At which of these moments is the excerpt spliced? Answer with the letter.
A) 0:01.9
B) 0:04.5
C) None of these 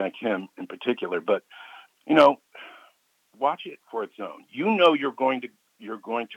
A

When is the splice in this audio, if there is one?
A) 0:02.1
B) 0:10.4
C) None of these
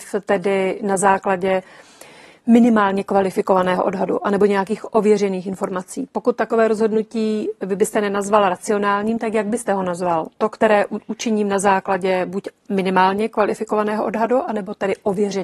C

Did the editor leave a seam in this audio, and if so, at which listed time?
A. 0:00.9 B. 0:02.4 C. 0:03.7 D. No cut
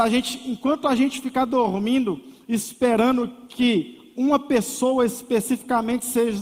D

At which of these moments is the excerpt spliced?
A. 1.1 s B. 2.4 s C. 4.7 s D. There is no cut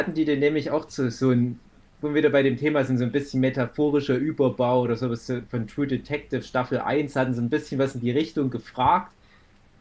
D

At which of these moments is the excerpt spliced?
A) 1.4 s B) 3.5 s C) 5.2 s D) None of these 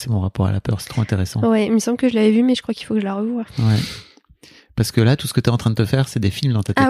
D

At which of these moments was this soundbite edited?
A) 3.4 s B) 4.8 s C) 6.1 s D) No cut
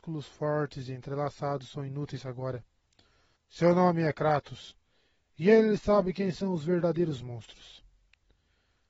A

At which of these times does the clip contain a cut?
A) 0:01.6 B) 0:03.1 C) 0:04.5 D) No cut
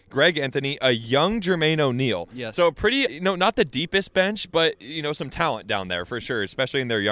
B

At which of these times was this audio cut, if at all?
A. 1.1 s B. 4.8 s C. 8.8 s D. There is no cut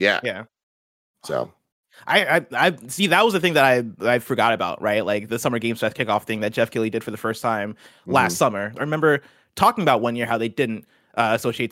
C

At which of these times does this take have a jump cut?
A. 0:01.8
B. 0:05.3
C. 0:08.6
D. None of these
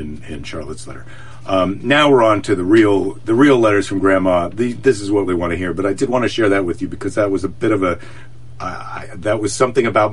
B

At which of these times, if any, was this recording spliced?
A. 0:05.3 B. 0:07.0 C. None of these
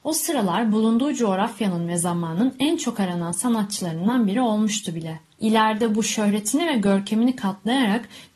A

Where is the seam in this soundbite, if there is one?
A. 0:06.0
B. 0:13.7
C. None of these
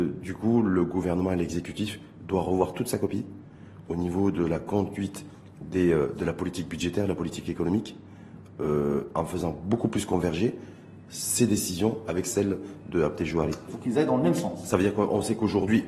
B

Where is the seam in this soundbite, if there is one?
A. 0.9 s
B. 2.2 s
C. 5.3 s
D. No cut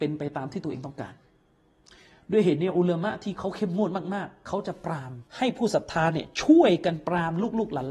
C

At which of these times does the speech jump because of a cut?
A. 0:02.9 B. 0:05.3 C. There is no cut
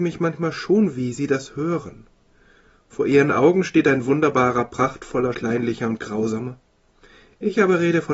B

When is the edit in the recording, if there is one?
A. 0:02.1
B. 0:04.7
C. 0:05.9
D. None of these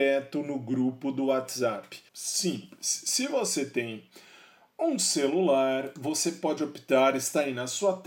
A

